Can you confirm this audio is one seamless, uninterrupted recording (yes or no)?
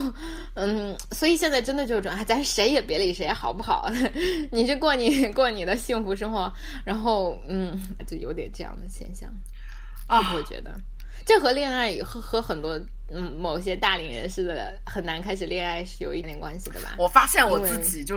no